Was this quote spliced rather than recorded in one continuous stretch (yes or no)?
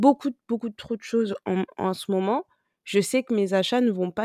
no